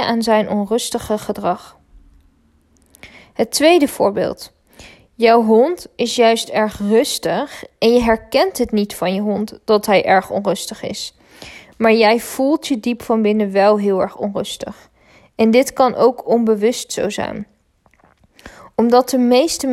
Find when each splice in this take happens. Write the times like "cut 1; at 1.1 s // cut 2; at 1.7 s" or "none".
none